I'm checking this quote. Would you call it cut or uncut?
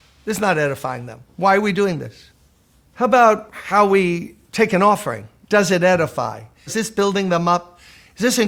cut